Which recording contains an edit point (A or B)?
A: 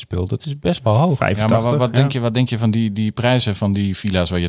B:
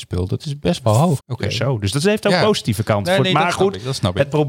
B